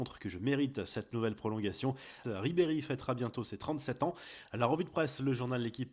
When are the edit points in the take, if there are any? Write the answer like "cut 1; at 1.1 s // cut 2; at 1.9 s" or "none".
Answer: cut 1; at 2.2 s